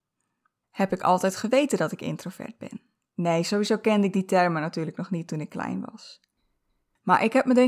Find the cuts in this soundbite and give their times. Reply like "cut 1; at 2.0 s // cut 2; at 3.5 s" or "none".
none